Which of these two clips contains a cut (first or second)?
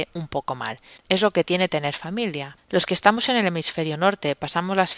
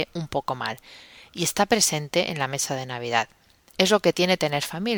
first